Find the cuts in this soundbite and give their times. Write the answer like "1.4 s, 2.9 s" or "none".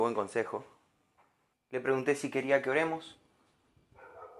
1.5 s